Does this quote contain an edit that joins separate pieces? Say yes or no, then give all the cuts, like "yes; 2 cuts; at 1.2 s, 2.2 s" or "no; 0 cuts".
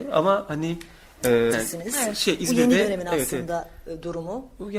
yes; 1 cut; at 1.5 s